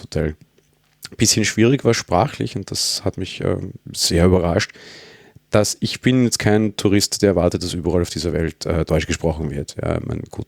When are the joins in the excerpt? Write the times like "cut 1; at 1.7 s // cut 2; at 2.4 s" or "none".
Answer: none